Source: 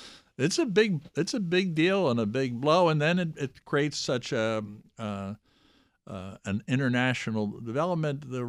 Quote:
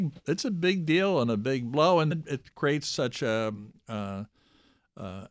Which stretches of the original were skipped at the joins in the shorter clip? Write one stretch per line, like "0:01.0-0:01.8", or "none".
0:03.0-0:03.2